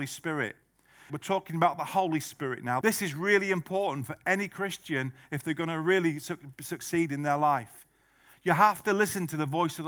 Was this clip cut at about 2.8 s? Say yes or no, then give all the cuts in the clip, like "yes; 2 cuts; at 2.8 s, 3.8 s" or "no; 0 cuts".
yes; 2 cuts; at 1.1 s, 2.8 s